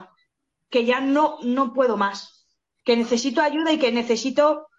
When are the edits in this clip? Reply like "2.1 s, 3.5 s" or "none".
2.8 s